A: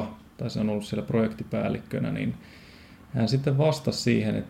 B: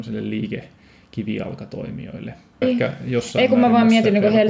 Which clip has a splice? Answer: B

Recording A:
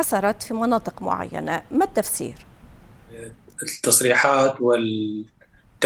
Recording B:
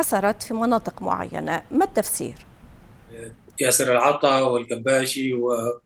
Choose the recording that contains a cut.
B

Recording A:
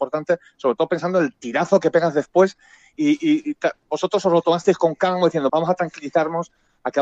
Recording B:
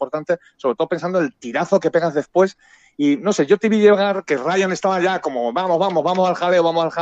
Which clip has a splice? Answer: A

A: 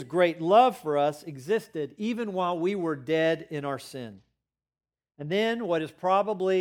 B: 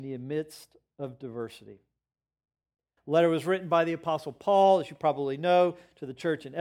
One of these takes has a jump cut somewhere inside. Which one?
B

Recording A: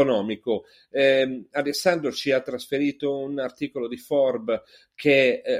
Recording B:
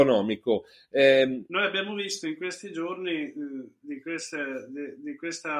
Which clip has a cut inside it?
B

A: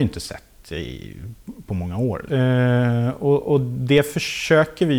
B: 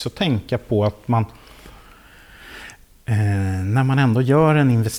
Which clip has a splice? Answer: A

